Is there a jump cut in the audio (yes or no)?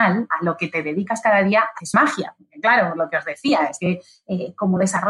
no